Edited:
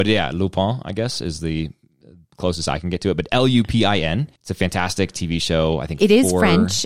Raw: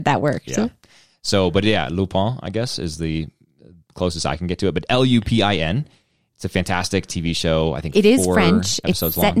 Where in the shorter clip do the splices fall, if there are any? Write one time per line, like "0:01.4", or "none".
0:04.4